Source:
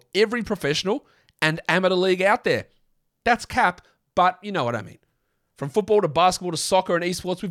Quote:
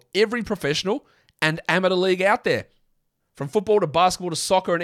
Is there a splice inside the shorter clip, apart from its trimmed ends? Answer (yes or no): yes